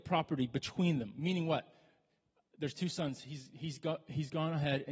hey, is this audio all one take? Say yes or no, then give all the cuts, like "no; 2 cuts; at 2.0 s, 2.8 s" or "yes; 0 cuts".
yes; 0 cuts